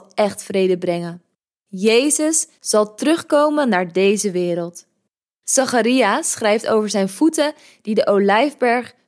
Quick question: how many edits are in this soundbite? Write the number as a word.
one